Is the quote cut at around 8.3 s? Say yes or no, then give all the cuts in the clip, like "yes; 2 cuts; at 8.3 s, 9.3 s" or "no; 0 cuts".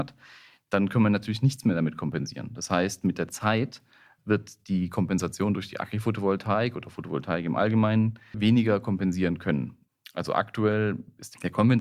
yes; 1 cut; at 8.3 s